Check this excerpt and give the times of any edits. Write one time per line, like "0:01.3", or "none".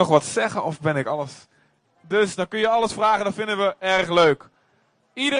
0:01.8